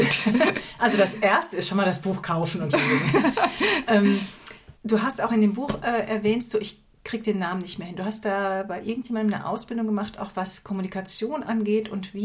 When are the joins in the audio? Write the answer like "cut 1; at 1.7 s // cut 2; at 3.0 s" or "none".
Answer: cut 1; at 4.7 s